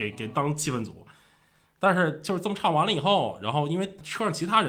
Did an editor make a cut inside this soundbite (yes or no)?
no